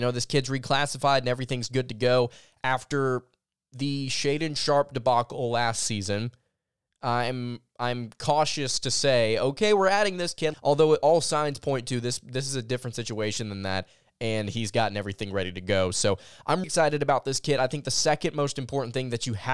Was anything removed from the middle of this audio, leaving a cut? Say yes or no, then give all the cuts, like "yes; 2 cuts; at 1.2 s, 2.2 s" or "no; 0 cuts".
yes; 2 cuts; at 10.5 s, 16.6 s